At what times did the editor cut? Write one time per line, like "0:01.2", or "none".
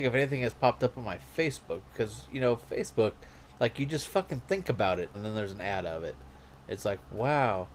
0:05.1